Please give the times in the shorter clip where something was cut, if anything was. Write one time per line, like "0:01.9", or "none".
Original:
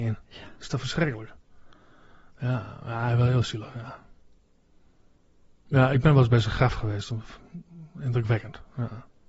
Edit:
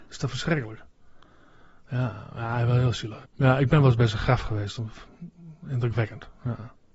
0:03.2